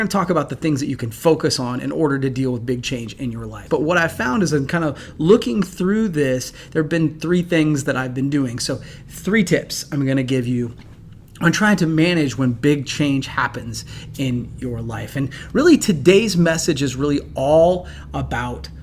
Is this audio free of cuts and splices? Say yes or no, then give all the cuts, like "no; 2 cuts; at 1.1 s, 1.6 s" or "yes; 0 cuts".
no; 1 cut; at 3.7 s